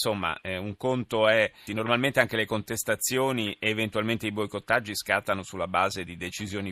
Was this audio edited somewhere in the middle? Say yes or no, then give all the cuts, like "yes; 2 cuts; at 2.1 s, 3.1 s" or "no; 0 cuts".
yes; 1 cut; at 1.7 s